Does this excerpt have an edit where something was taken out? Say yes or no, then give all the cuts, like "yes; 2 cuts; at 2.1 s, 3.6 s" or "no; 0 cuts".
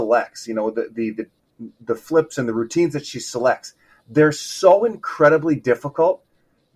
no; 0 cuts